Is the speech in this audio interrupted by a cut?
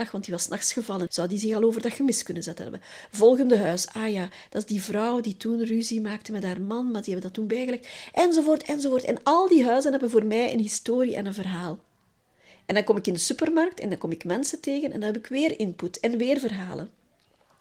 yes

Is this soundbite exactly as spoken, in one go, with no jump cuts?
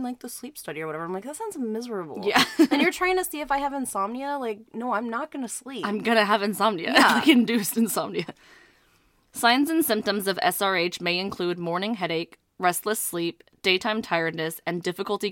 yes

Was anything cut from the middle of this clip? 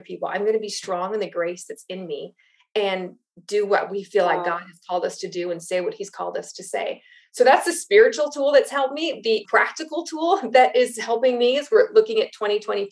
no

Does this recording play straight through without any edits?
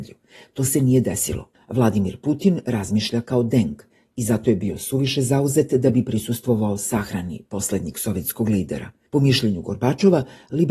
no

